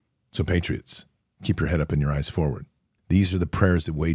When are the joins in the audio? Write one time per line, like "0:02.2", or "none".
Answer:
0:03.0